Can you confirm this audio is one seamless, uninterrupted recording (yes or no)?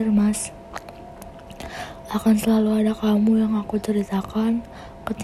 yes